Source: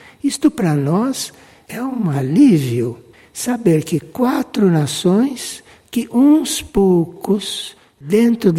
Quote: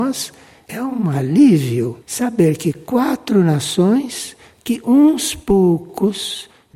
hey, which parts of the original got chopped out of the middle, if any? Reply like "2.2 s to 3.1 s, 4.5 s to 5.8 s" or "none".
3.0 s to 3.3 s